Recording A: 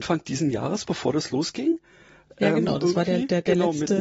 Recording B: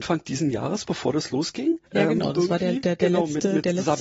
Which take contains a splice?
B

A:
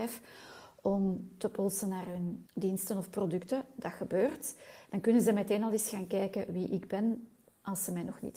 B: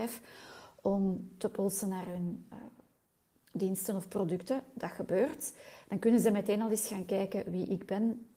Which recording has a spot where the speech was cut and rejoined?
A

